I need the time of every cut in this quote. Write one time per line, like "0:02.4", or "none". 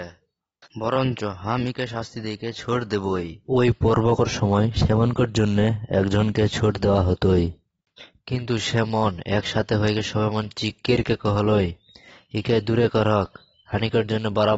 0:03.4